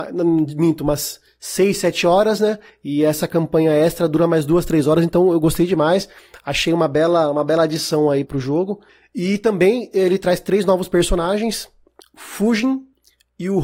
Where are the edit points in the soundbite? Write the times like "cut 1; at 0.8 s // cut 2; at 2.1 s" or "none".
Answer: cut 1; at 8.2 s // cut 2; at 12.0 s